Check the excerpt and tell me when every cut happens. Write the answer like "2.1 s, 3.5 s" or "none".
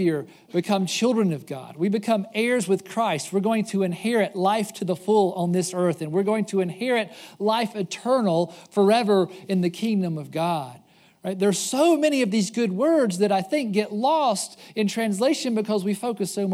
none